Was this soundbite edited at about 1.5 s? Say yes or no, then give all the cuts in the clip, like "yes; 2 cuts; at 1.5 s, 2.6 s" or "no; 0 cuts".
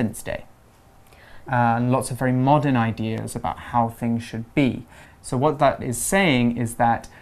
yes; 2 cuts; at 1.5 s, 5.0 s